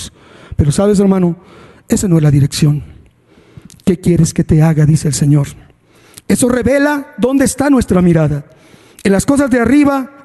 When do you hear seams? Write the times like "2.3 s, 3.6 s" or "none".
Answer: none